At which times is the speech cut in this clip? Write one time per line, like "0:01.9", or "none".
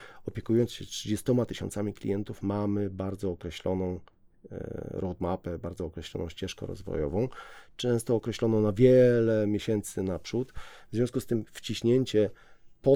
none